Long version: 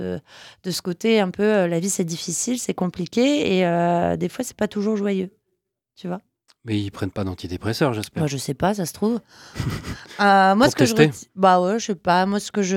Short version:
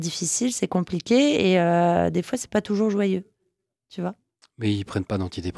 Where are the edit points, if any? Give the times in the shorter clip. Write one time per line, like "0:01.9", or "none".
none